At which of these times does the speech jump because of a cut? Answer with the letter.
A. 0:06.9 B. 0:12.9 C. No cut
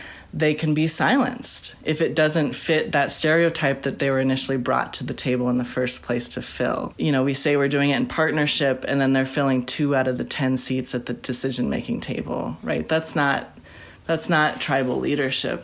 A